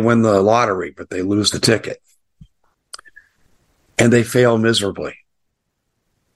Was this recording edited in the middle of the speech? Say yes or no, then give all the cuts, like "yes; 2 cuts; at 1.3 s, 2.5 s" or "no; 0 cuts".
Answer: no; 0 cuts